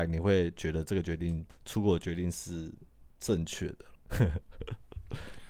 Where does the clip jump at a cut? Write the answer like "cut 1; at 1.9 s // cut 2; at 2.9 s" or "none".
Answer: cut 1; at 4.0 s